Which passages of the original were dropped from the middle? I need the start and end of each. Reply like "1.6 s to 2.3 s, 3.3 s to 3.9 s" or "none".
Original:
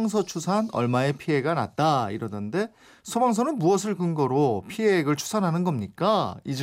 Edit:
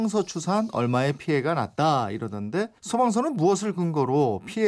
2.8 s to 3.0 s